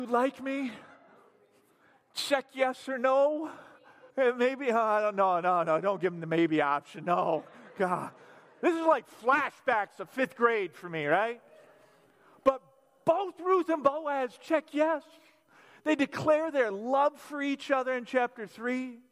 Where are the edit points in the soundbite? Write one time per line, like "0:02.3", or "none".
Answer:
0:04.1